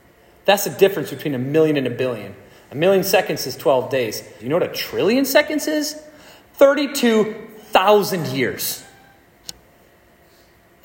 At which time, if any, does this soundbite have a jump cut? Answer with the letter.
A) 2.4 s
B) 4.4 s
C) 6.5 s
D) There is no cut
B